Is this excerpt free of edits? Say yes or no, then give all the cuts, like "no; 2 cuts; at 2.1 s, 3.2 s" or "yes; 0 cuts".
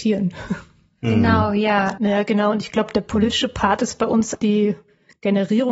no; 2 cuts; at 2.0 s, 4.3 s